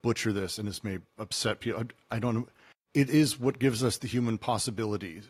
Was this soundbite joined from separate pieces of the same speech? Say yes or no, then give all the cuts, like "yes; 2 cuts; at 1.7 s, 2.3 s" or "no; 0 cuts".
no; 0 cuts